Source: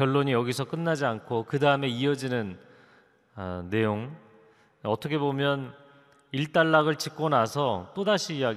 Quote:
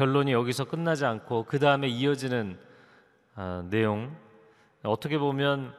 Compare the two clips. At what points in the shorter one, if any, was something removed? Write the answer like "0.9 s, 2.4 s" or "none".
none